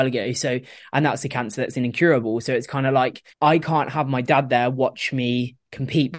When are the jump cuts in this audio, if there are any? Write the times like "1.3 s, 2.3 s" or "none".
3.3 s